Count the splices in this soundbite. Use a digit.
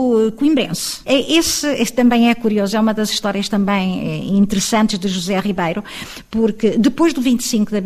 1